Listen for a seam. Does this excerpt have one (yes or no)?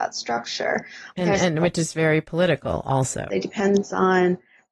yes